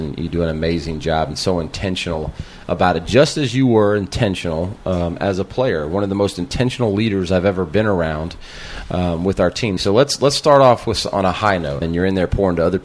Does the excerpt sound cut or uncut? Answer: cut